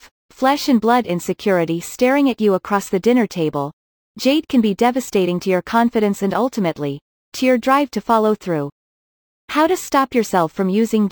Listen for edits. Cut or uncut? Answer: uncut